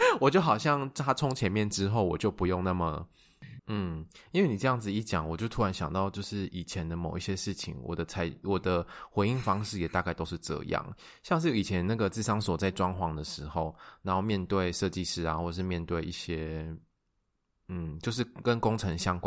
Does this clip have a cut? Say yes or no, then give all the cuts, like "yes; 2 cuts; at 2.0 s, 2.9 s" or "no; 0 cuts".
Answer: yes; 1 cut; at 3.6 s